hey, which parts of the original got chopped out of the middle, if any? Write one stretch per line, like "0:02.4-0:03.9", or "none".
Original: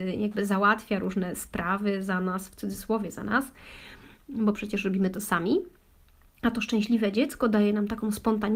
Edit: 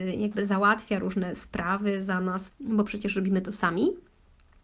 0:02.5-0:04.2